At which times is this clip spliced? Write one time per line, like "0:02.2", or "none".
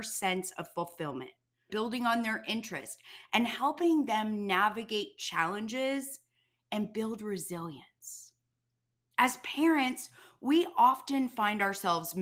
0:01.7
0:09.1